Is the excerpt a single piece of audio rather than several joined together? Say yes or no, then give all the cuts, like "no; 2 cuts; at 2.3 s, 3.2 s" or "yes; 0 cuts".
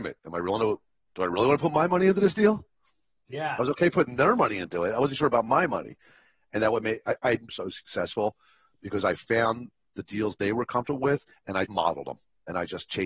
no; 2 cuts; at 7.5 s, 11.7 s